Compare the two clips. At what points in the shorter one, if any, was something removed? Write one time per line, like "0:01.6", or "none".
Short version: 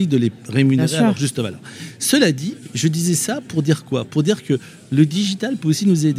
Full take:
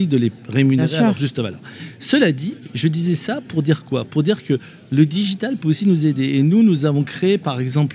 none